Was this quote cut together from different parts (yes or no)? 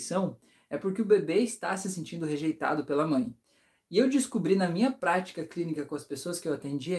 no